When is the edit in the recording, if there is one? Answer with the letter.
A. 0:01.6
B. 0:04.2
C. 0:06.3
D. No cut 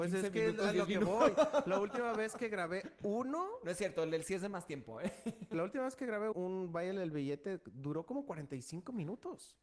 C